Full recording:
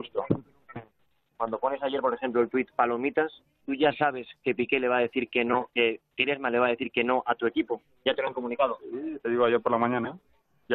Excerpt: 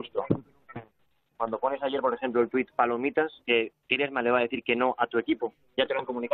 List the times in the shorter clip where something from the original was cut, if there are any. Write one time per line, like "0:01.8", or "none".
0:03.4